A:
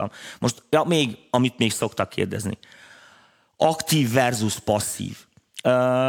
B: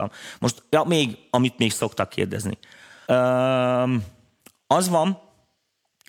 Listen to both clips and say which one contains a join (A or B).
B